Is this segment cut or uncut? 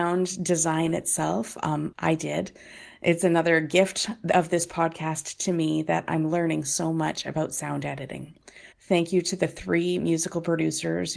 cut